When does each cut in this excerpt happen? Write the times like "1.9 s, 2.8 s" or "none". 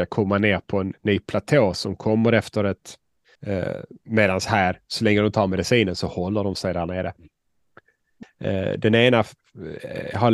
3.4 s, 8.2 s